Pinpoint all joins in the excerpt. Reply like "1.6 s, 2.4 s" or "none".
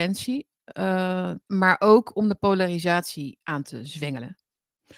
1.4 s